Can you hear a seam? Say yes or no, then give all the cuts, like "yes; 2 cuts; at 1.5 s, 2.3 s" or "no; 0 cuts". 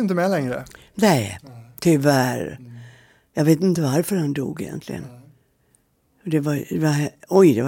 no; 0 cuts